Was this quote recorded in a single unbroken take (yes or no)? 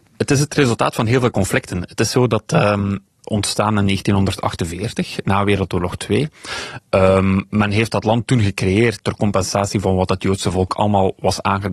no